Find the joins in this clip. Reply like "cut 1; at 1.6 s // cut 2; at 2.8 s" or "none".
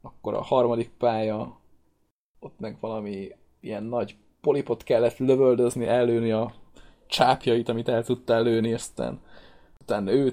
none